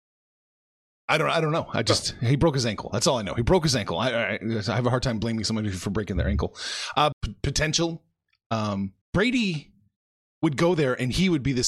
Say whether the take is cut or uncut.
cut